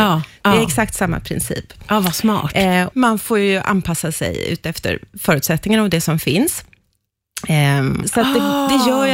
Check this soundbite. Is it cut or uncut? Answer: cut